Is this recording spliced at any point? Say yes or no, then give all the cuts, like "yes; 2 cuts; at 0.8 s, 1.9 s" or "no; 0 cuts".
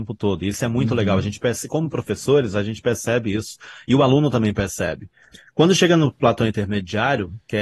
no; 0 cuts